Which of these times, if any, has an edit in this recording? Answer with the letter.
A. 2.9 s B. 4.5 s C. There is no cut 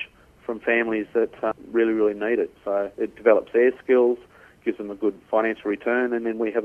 A